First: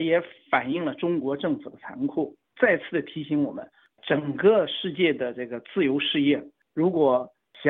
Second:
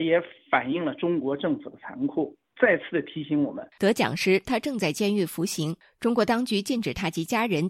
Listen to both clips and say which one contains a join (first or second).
second